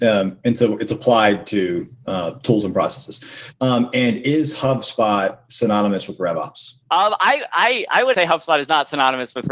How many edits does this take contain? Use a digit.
3